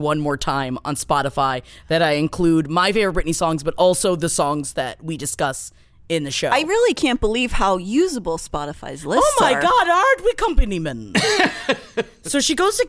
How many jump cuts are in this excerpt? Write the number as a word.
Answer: zero